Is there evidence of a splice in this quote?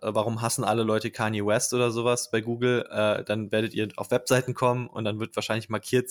no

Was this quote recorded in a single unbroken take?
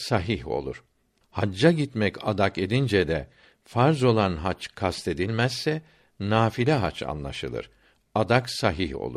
yes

